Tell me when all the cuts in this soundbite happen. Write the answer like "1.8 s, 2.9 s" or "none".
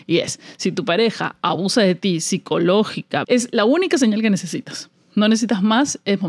3.2 s